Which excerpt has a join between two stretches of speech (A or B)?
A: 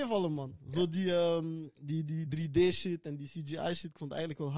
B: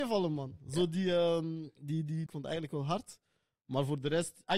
B